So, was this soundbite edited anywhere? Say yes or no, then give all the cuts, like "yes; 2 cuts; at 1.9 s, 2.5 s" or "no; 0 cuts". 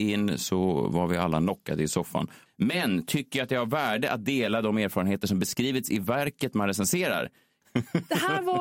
yes; 2 cuts; at 2.5 s, 7.6 s